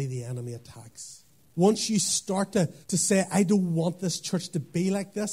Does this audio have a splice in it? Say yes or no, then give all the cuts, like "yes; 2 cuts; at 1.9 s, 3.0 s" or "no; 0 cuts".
yes; 2 cuts; at 1.5 s, 2.8 s